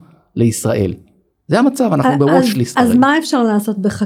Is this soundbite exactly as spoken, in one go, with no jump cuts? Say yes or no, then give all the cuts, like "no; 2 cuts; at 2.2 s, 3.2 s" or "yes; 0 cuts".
yes; 0 cuts